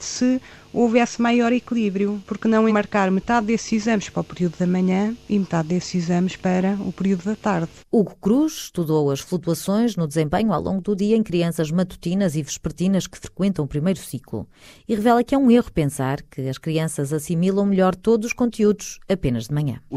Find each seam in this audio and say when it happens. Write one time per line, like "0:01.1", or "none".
0:02.7
0:07.8